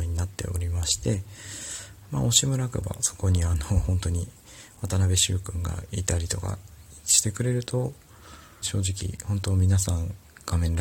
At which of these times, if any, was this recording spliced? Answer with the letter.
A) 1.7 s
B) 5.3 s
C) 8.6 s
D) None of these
C